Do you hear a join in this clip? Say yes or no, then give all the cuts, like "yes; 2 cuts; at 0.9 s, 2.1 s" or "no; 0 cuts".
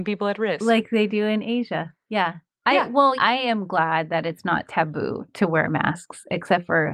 yes; 2 cuts; at 3.2 s, 5.3 s